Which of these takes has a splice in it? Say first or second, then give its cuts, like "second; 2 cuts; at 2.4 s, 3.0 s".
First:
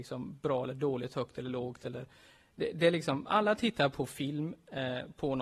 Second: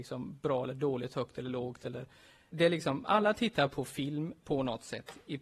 second; 2 cuts; at 2.5 s, 4.4 s